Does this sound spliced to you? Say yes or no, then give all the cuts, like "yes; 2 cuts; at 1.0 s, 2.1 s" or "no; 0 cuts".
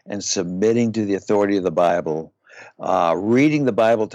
no; 0 cuts